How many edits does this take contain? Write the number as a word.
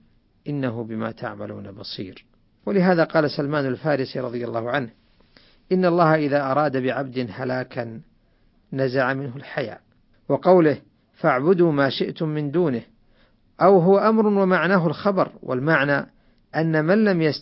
two